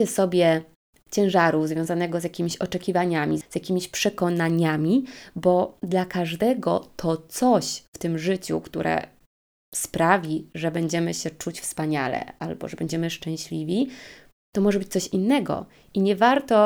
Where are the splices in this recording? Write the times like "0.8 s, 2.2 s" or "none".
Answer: none